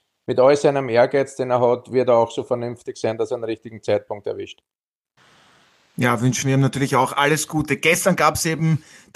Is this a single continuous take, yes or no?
yes